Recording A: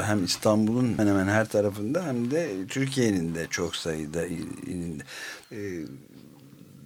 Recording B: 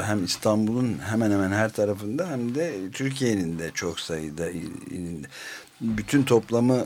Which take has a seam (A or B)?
A